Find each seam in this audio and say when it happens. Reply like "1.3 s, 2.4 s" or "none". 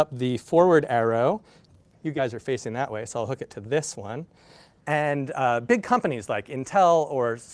4.8 s